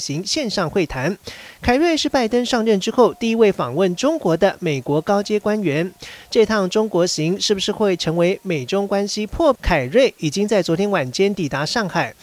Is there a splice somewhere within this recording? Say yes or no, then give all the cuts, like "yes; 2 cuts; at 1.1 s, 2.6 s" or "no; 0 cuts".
yes; 1 cut; at 9.5 s